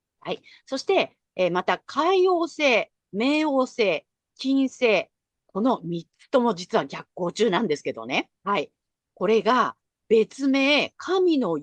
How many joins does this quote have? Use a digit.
1